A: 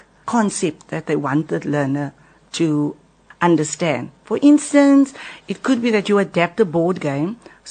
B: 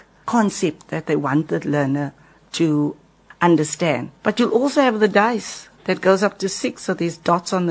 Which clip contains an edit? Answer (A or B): B